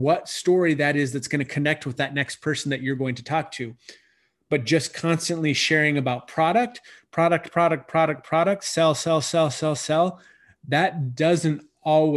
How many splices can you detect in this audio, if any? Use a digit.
0